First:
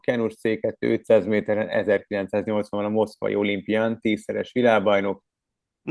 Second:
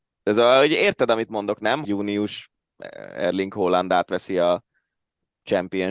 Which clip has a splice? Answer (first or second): second